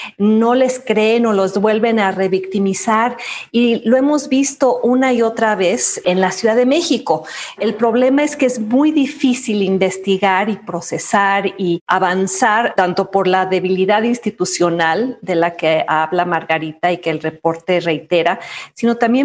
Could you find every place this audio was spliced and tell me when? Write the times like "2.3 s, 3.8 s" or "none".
7.6 s

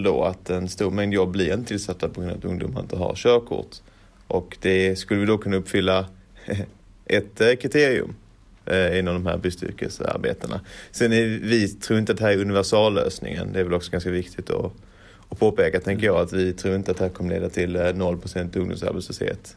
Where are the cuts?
none

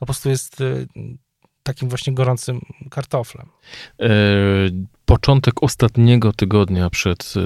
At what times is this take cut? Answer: none

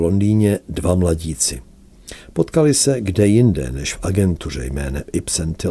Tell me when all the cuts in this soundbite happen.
none

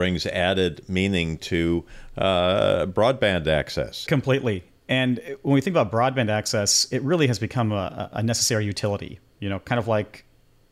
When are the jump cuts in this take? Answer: 4.1 s

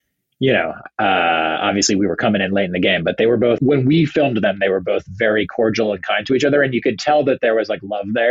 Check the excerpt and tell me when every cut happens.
3.6 s

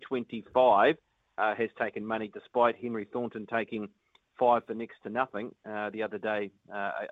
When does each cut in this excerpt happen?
none

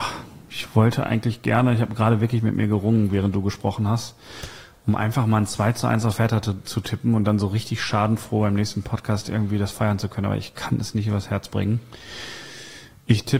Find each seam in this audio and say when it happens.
none

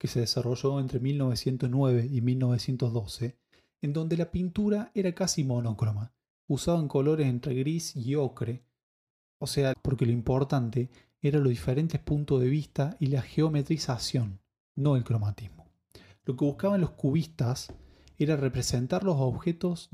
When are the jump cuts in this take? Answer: 9.7 s

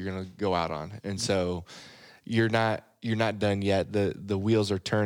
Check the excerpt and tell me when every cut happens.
1.0 s

